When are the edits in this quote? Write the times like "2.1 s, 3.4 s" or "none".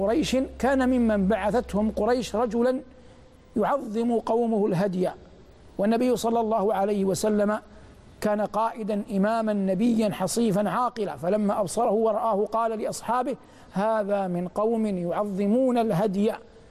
none

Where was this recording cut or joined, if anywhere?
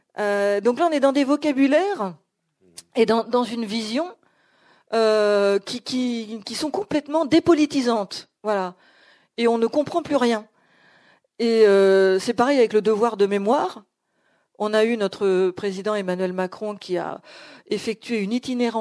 none

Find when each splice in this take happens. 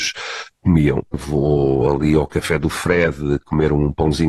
1.1 s

